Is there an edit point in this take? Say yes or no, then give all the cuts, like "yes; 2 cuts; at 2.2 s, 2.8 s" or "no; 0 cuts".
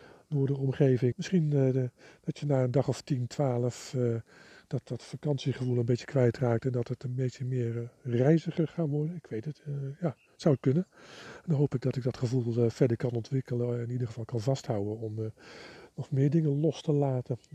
yes; 1 cut; at 1.1 s